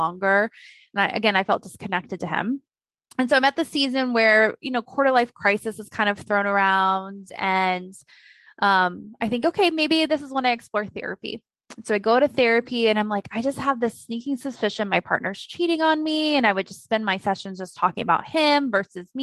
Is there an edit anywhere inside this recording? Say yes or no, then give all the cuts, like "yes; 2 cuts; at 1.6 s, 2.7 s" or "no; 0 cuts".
no; 0 cuts